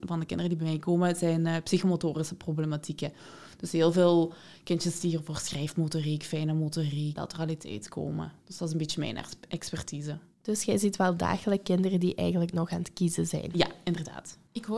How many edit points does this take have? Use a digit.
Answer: 1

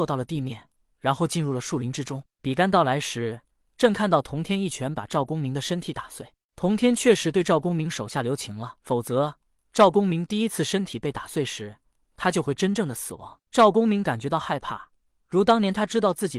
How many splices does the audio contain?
3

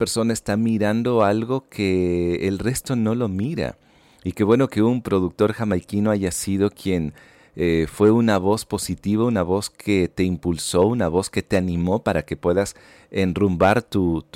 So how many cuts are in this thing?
0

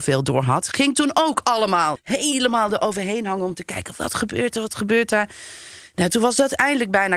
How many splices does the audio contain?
1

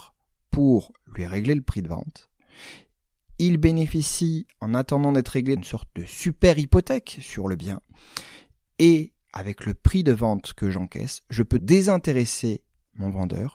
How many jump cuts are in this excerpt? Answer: 3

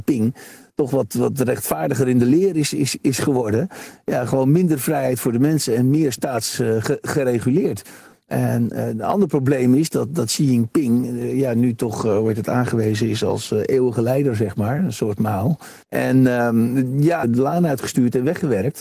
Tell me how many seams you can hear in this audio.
2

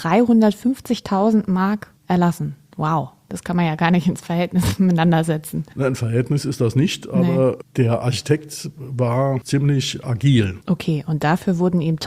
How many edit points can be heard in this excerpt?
1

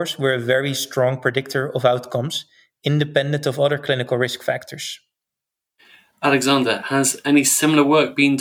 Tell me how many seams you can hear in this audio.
0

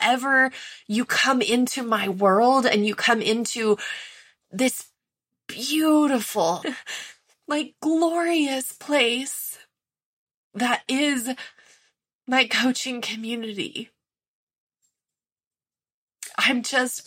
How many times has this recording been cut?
1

